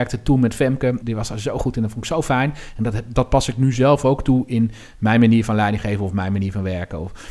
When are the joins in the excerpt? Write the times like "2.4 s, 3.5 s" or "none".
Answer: 1.0 s